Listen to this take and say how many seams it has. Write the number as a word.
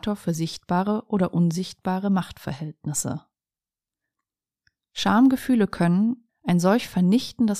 one